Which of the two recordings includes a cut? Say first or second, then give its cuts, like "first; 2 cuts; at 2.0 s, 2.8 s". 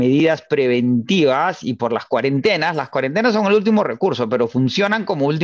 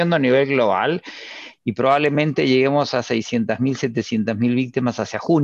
second; 1 cut; at 1.5 s